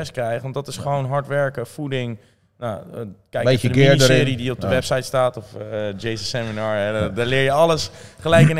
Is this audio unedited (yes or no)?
yes